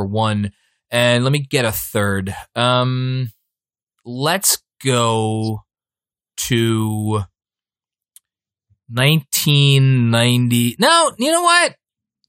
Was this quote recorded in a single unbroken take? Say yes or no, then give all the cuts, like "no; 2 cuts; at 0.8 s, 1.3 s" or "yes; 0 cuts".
no; 1 cut; at 4.0 s